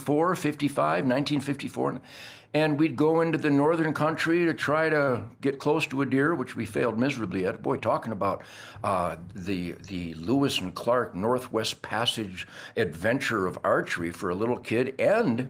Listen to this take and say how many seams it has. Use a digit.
0